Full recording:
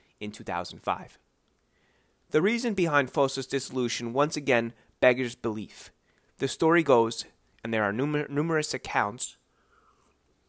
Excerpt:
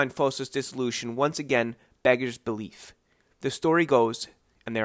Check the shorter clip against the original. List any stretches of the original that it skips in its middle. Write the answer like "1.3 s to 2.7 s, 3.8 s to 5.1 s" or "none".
none